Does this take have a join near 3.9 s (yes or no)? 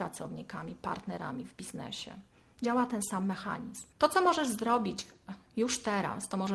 yes